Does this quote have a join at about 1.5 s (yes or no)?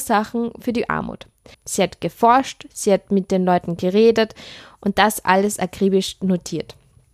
yes